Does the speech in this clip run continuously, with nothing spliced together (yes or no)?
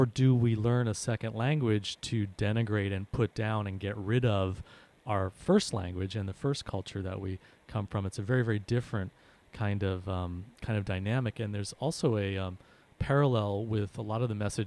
yes